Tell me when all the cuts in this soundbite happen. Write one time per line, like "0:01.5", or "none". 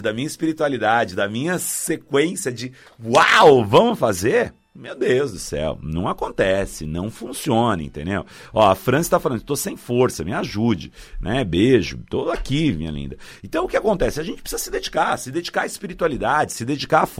none